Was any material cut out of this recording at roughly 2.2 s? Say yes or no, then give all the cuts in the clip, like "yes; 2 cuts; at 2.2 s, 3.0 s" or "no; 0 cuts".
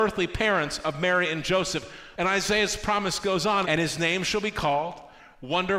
yes; 2 cuts; at 2.2 s, 3.6 s